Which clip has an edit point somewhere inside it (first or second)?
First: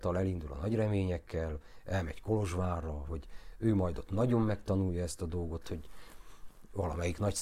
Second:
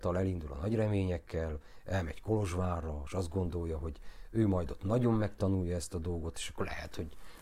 first